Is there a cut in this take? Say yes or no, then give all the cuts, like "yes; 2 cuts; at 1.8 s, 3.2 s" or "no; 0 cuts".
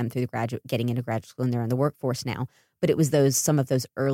no; 0 cuts